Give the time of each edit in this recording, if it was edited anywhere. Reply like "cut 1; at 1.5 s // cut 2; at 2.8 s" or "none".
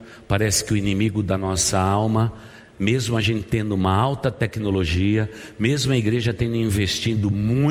none